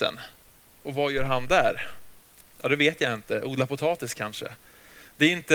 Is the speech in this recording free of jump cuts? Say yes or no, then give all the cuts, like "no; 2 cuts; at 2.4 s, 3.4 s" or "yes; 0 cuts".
yes; 0 cuts